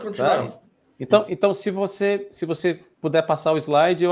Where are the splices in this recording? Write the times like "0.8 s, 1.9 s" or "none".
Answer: 1.3 s